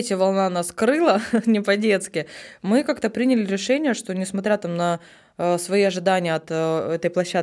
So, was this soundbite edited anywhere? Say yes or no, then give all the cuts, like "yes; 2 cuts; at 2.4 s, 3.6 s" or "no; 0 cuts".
no; 0 cuts